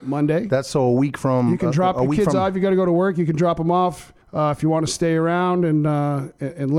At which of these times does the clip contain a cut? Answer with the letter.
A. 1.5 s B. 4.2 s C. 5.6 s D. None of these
B